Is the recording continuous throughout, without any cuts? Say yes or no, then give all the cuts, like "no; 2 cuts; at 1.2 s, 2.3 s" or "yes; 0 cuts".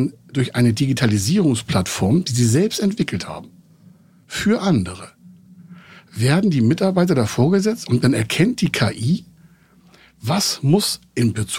yes; 0 cuts